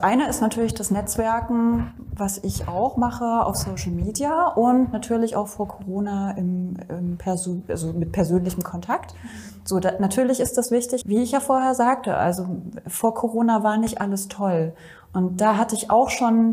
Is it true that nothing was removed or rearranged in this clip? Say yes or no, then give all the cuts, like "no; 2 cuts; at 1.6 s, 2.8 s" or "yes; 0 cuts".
no; 1 cut; at 11.0 s